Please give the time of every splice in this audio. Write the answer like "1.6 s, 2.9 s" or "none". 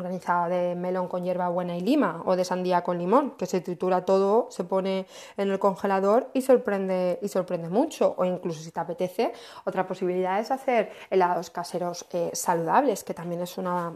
none